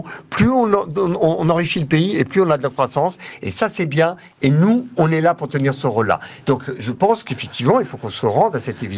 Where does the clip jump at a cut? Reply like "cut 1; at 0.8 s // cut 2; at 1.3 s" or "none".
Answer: cut 1; at 6.4 s